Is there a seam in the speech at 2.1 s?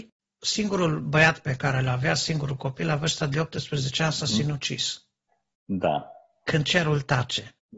no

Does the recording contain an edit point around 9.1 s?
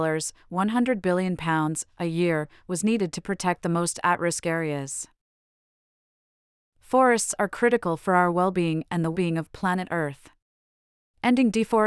yes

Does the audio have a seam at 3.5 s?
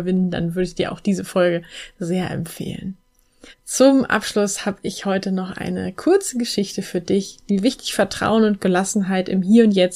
yes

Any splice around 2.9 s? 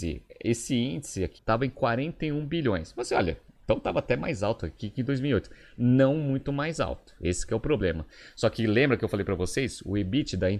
no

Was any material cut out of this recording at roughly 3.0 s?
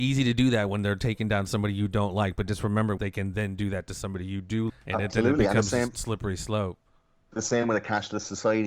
yes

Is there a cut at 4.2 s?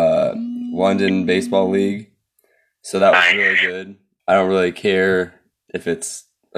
yes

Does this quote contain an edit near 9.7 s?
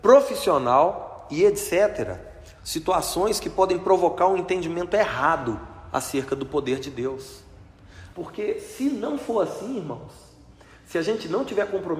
no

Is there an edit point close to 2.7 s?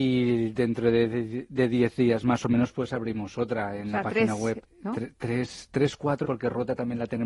no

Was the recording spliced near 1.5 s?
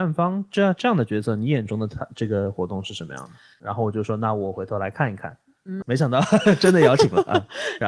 no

